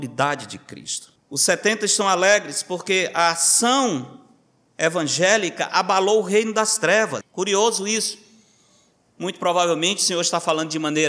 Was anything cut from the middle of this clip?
yes; 2 cuts; at 1.2 s, 7.2 s

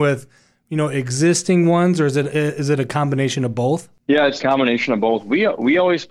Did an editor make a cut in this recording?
yes; 1 cut; at 4.4 s

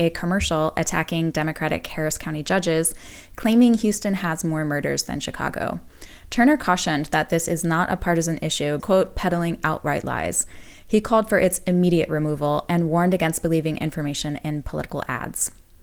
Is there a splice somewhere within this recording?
yes; 1 cut; at 8.8 s

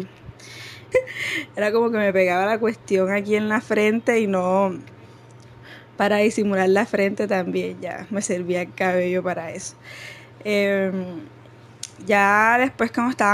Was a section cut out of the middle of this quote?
yes; 1 cut; at 0.9 s

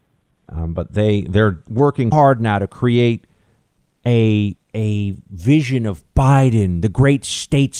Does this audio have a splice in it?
yes; 1 cut; at 2.1 s

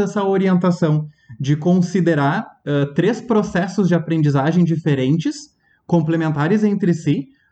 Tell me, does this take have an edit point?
no; 0 cuts

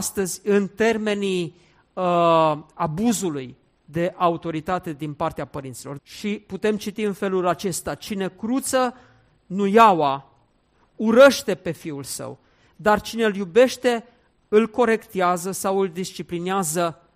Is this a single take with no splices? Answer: no; 1 cut; at 6.0 s

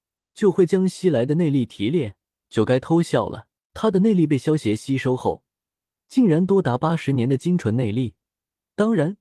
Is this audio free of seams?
no; 2 cuts; at 2.4 s, 3.7 s

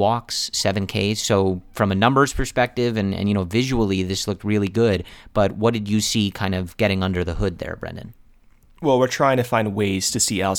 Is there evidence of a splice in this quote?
no; 0 cuts

